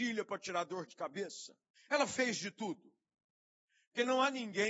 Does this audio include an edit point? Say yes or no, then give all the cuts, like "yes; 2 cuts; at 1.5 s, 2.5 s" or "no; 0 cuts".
yes; 1 cut; at 1.8 s